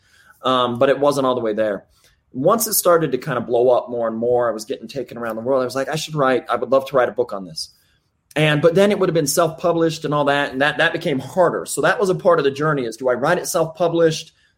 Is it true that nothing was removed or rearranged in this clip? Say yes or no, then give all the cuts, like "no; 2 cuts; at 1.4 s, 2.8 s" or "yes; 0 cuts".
yes; 0 cuts